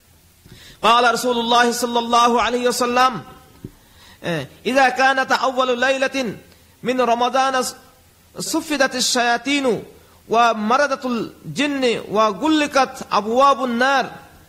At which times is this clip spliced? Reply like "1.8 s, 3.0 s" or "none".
8.5 s